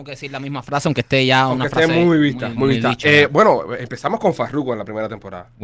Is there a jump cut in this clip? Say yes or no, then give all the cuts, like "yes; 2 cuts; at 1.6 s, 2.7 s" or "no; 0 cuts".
no; 0 cuts